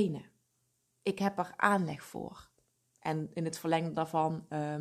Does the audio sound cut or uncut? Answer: uncut